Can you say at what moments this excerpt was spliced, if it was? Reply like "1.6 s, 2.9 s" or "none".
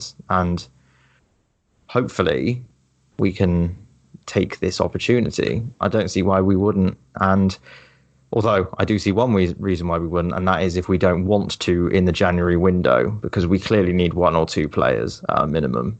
none